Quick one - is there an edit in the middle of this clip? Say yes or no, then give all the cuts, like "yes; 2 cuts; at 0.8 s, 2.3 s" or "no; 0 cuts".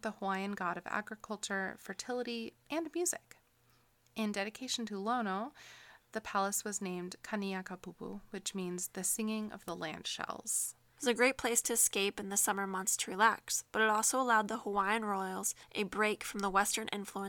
yes; 2 cuts; at 2.6 s, 10.9 s